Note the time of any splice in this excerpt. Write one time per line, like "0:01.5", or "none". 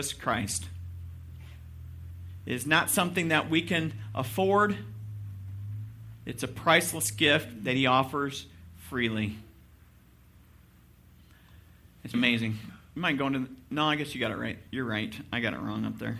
0:12.1
0:14.7